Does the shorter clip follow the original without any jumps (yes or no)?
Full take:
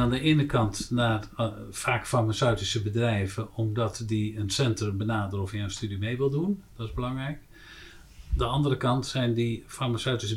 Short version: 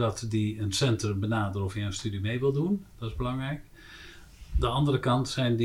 yes